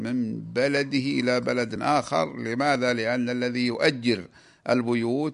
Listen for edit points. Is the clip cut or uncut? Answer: uncut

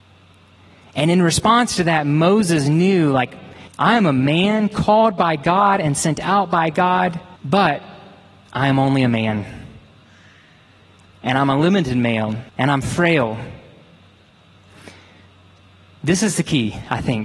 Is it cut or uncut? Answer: cut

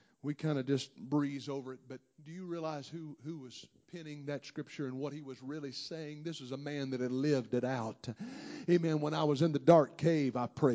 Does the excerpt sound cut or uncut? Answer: uncut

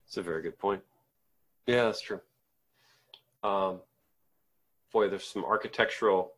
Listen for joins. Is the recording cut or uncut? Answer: uncut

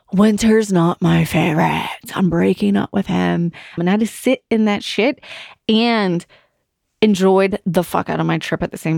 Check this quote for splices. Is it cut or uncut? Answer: cut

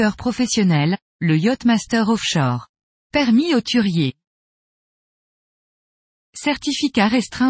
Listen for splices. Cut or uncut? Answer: cut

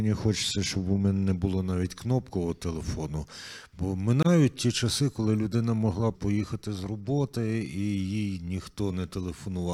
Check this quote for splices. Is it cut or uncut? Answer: cut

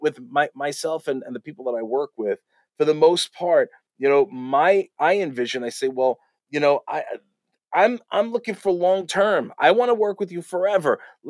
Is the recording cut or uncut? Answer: uncut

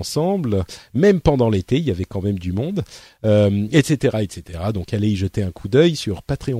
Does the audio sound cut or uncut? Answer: uncut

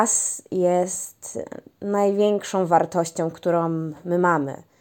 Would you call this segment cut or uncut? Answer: uncut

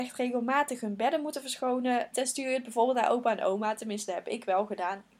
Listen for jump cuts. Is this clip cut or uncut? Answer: cut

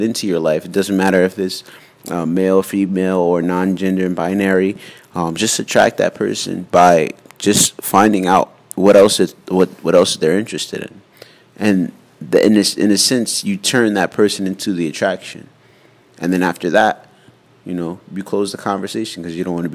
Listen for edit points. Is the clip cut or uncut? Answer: uncut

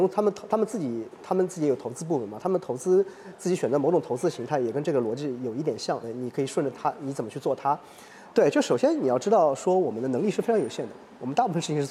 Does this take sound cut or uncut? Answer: cut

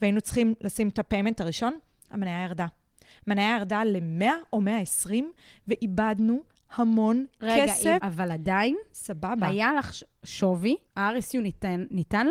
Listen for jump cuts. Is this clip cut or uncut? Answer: cut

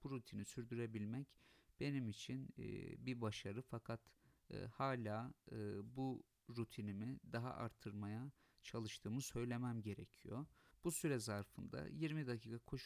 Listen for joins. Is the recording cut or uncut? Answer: cut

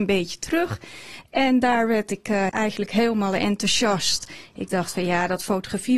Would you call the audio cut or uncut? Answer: cut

